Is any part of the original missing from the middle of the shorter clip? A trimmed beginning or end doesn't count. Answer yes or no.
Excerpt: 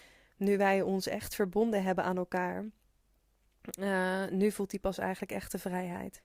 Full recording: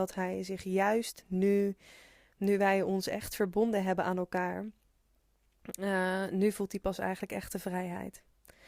no